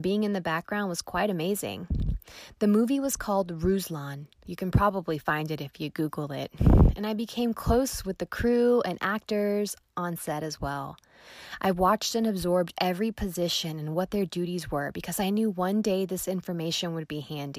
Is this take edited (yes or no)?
yes